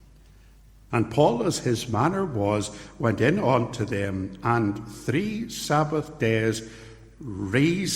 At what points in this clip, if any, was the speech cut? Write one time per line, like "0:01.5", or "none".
0:00.9

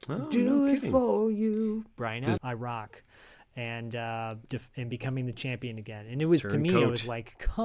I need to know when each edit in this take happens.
0:02.4

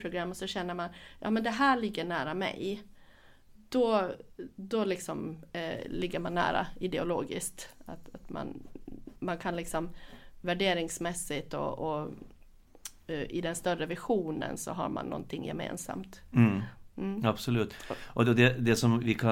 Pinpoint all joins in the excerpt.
none

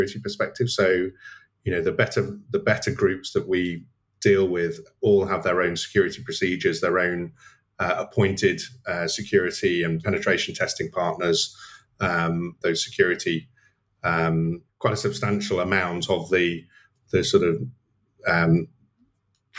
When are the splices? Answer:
0:12.6
0:14.7

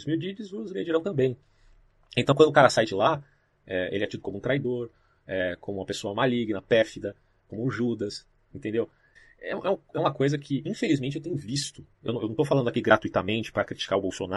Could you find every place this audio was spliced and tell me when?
none

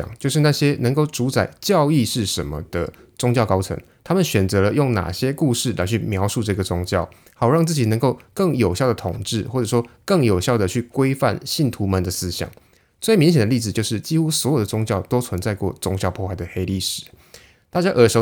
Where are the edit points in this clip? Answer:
none

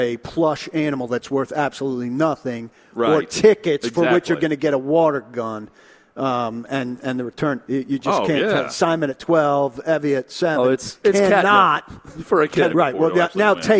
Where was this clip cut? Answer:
0:07.7
0:11.0
0:12.7

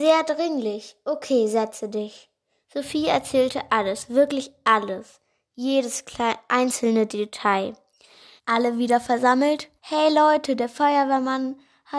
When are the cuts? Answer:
0:02.6
0:08.4
0:09.8

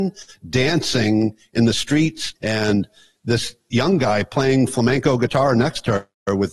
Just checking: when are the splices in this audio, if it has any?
0:02.4

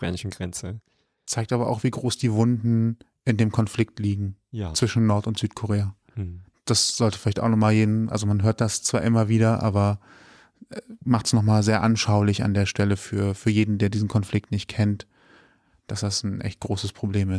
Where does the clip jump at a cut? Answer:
none

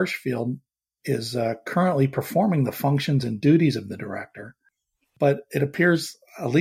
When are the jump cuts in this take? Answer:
none

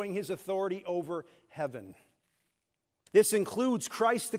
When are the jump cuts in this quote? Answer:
0:03.1

